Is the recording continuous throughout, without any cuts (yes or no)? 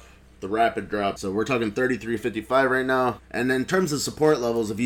no